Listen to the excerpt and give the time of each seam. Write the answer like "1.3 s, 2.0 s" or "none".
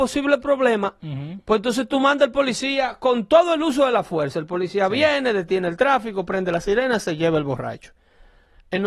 none